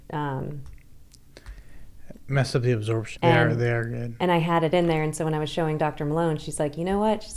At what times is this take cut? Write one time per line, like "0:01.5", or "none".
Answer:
0:03.2